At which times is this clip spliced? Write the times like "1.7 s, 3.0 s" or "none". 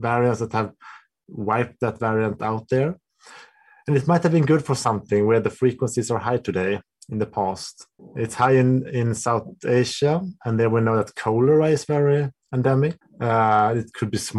none